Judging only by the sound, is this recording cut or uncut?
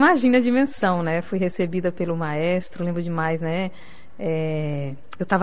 uncut